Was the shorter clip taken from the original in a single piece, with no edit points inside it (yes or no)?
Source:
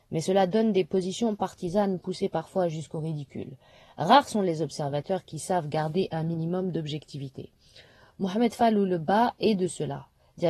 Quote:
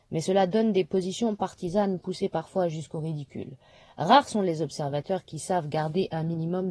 yes